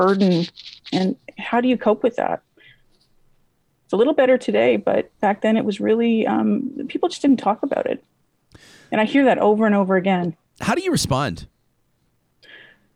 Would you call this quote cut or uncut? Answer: cut